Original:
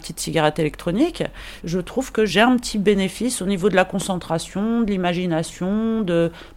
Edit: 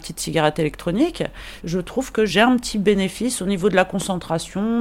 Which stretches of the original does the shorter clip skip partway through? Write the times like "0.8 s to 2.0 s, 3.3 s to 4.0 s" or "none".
none